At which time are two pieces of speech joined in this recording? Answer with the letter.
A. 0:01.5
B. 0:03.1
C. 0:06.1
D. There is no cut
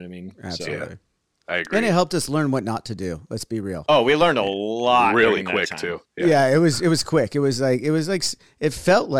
C